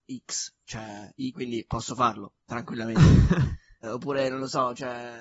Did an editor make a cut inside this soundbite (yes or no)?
yes